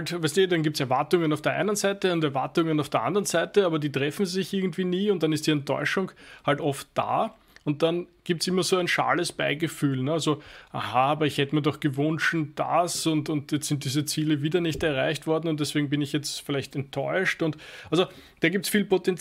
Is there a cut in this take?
no; 0 cuts

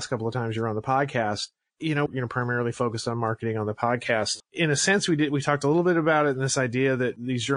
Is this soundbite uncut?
no; 2 cuts; at 2.1 s, 4.4 s

